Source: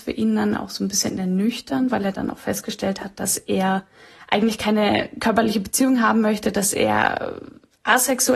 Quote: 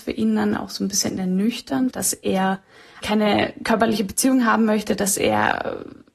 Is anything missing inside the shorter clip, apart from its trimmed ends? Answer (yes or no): yes